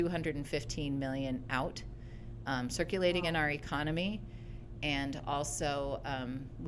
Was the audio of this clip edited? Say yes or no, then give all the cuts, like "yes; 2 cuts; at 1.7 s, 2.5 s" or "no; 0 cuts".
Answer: no; 0 cuts